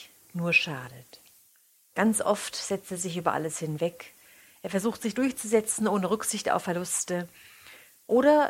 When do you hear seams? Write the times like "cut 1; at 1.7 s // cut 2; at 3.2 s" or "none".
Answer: none

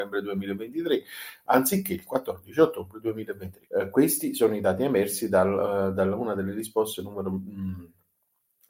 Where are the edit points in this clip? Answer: cut 1; at 3.7 s

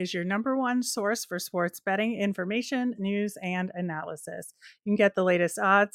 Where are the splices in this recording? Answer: cut 1; at 3.0 s

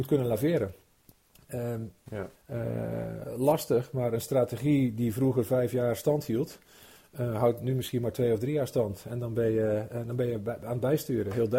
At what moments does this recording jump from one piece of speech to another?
cut 1; at 2.4 s

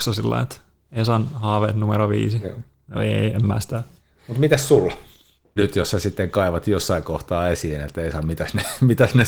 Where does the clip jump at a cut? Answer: cut 1; at 5.6 s

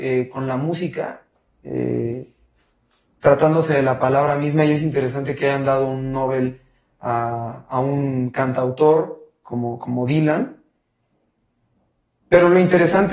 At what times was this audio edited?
none

